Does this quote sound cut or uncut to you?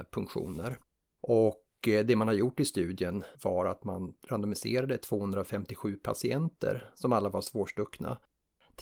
cut